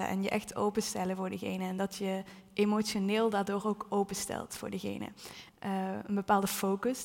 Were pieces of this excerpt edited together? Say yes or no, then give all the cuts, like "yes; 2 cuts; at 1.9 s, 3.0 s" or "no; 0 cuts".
yes; 1 cut; at 5.5 s